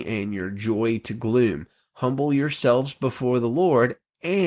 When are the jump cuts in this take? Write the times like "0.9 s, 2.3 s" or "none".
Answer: none